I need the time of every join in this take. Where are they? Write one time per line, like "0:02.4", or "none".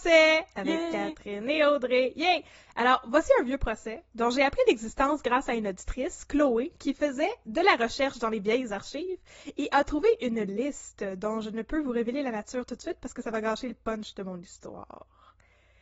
none